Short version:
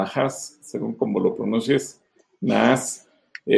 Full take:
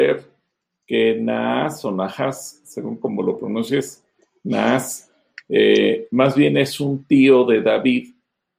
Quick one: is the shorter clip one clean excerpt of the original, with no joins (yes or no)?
yes